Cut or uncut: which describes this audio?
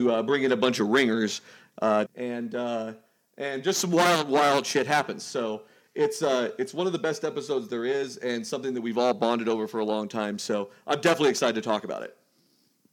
cut